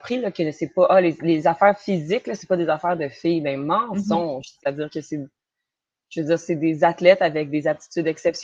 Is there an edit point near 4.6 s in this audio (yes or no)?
yes